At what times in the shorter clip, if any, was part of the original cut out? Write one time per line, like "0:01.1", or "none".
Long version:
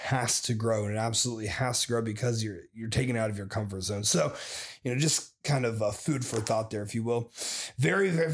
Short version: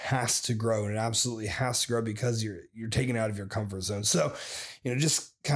none